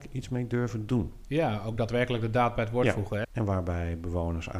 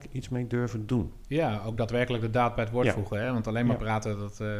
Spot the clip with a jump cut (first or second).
first